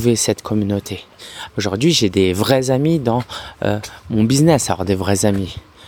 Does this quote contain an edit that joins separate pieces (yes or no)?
yes